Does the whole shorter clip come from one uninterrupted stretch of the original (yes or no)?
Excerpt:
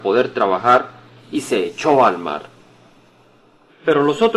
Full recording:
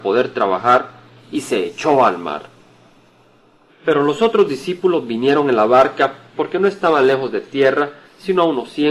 yes